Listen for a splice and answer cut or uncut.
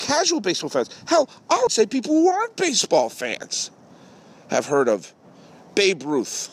cut